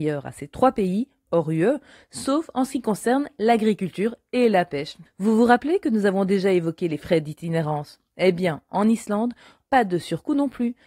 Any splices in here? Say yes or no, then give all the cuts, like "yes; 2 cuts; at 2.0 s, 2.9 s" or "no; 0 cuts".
yes; 2 cuts; at 5.1 s, 9.6 s